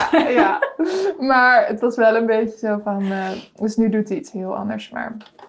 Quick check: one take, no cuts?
yes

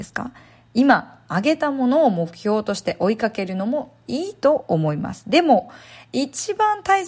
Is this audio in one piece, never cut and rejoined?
yes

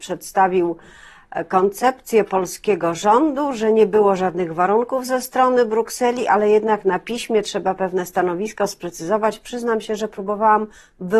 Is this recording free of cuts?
yes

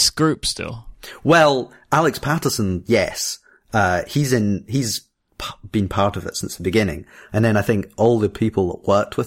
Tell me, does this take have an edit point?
no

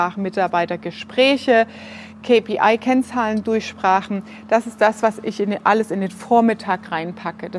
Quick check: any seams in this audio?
no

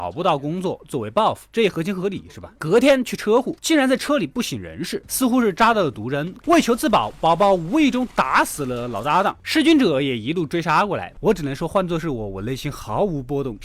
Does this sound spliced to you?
yes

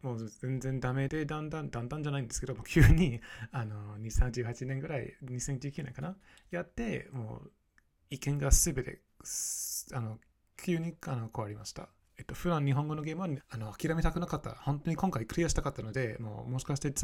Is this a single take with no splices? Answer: no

